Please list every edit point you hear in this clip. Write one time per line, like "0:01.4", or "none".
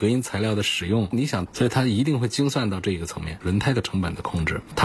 0:01.5
0:03.4